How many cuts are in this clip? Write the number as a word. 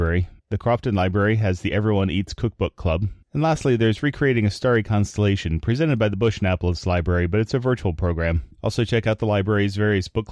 zero